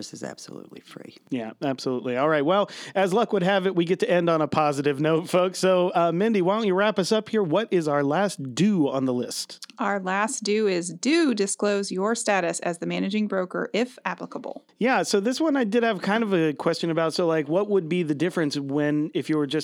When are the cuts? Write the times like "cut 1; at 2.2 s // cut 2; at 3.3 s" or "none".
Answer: none